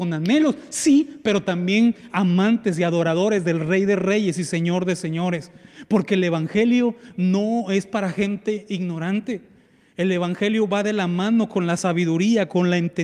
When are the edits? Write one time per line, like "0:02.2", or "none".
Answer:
none